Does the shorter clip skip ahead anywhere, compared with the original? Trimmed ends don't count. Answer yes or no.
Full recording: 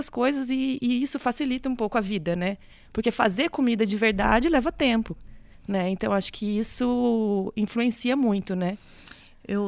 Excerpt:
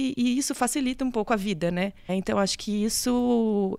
yes